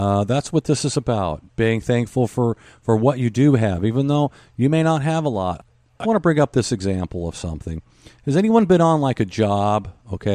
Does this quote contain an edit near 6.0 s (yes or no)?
yes